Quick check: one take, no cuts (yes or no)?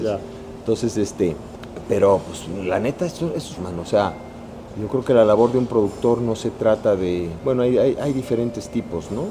no